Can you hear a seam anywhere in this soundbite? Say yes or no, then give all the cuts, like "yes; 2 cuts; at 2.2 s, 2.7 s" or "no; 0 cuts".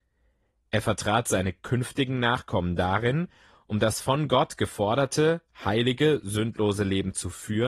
no; 0 cuts